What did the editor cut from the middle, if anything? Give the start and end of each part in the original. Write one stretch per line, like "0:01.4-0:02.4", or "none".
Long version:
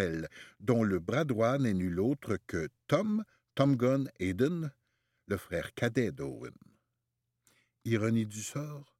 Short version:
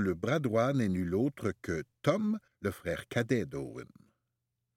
0:03.3-0:05.1